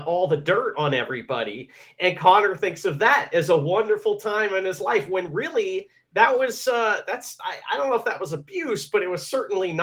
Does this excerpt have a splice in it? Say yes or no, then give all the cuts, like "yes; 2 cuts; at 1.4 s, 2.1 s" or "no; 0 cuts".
no; 0 cuts